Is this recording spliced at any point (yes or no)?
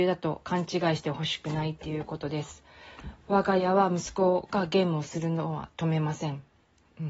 no